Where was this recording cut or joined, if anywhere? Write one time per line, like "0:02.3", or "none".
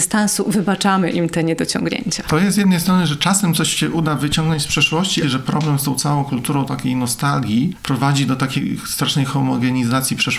0:05.2